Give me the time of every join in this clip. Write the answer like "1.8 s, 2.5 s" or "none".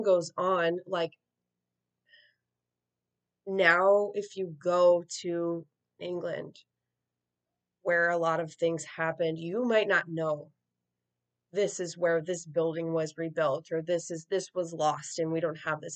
none